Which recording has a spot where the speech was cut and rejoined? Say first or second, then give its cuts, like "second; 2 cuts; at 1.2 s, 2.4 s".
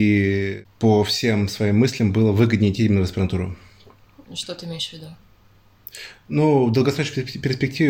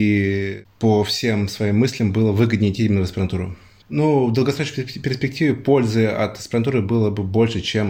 second; 1 cut; at 3.8 s